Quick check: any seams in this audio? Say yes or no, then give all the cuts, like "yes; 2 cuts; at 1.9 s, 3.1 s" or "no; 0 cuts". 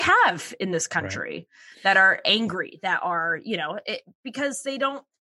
no; 0 cuts